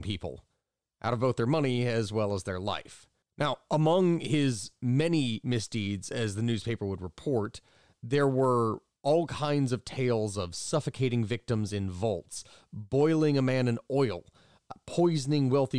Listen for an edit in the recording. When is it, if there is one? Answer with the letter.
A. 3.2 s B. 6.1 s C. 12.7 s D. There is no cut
A